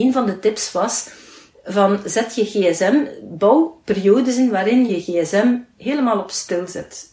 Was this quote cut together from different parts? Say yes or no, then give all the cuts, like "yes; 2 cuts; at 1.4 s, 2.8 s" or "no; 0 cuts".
yes; 1 cut; at 4.9 s